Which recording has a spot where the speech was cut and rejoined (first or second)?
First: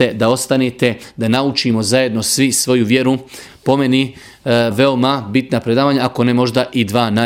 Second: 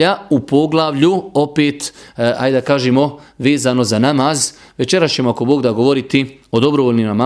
first